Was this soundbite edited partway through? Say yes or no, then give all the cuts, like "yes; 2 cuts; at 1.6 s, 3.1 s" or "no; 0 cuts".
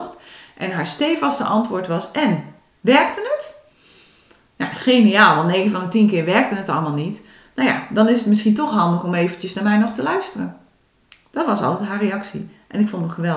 no; 0 cuts